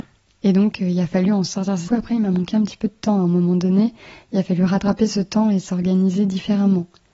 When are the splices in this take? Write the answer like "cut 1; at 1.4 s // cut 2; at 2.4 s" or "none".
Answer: cut 1; at 1.9 s